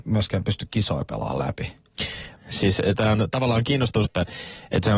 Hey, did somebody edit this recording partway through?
yes; 2 cuts; at 2.4 s, 4.0 s

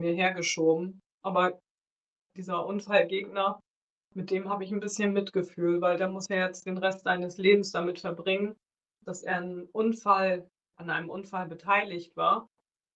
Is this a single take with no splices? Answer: no; 1 cut; at 1.1 s

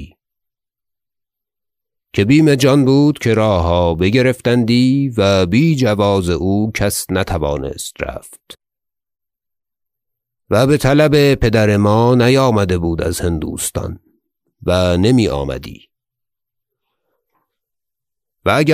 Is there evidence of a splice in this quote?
no; 0 cuts

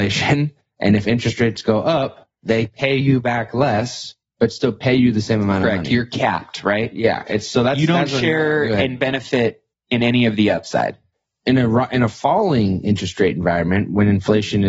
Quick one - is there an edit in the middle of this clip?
no; 0 cuts

